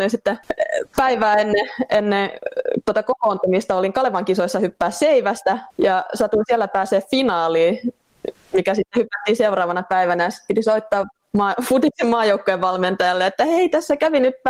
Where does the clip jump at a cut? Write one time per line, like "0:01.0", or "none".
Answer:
0:05.7

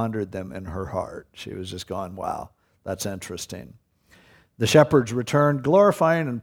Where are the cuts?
none

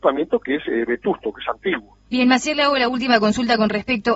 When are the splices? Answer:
0:02.1

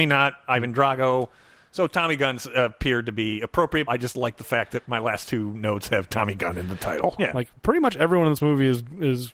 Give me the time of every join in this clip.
0:03.9
0:07.2

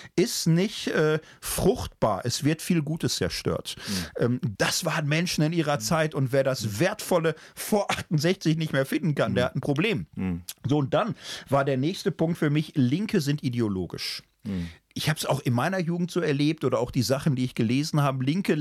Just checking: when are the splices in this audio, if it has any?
0:04.5

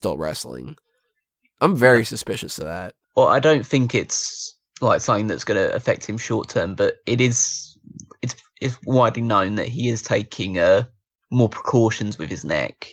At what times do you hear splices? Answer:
0:03.0

